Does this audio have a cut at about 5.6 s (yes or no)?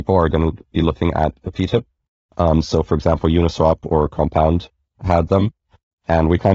no